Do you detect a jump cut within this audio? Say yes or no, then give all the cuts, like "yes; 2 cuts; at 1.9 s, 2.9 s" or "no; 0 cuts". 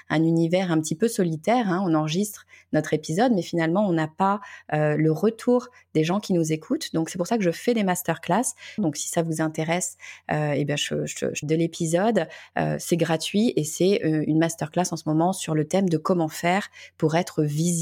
yes; 2 cuts; at 8.8 s, 11.4 s